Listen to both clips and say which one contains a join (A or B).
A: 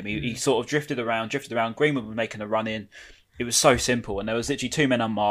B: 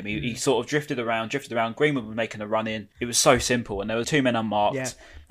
B